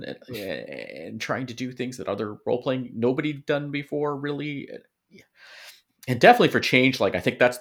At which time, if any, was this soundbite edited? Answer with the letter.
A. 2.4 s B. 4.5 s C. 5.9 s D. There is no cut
C